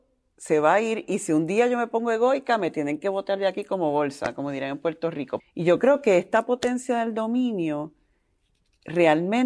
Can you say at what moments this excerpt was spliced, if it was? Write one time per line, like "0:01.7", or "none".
0:05.4

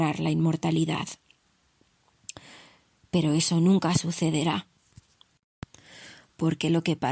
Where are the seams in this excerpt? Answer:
none

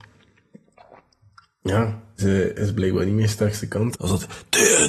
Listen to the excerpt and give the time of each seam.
0:02.2
0:03.9

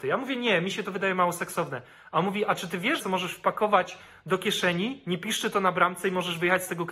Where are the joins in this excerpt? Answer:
0:03.0

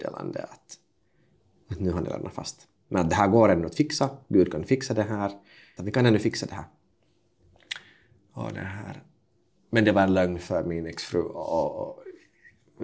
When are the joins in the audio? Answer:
0:05.8

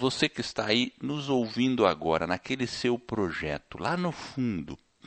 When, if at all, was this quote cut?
none

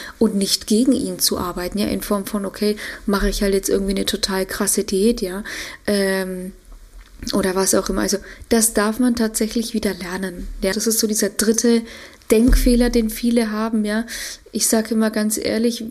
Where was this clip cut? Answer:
0:10.7

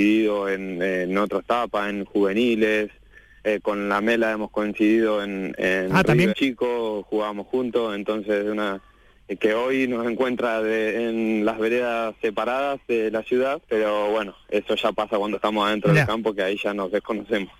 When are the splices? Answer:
0:06.3
0:13.6

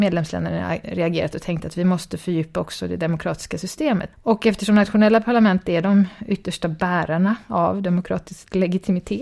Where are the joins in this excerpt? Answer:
0:04.1

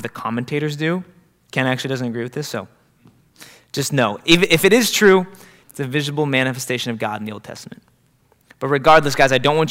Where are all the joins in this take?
0:05.6

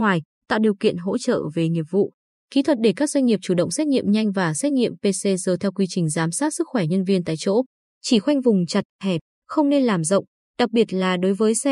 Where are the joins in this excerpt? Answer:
0:10.4

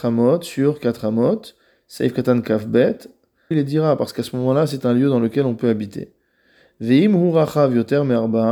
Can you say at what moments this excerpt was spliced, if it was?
0:03.5

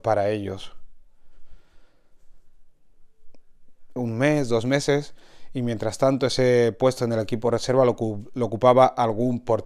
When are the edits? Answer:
0:04.0

